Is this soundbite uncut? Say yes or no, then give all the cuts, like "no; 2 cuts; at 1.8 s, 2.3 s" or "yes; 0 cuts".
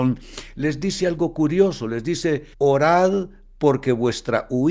no; 1 cut; at 2.5 s